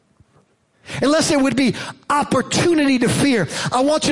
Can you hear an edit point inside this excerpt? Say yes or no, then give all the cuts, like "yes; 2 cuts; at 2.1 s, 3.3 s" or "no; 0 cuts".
no; 0 cuts